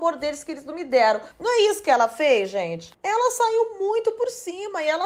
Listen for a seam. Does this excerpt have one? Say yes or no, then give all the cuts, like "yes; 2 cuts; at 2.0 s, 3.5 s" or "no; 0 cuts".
no; 0 cuts